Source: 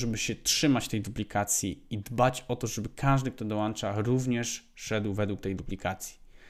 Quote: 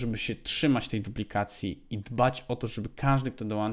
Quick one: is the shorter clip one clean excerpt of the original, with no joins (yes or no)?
yes